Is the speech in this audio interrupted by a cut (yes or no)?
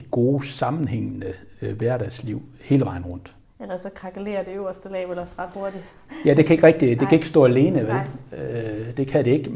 yes